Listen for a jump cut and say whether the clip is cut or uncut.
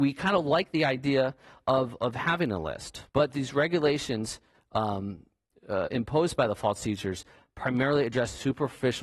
cut